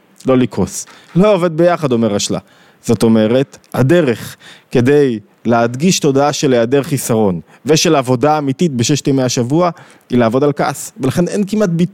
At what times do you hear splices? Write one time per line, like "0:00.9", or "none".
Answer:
0:01.0